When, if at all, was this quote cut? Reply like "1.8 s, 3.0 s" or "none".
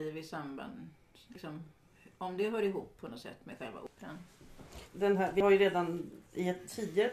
4.9 s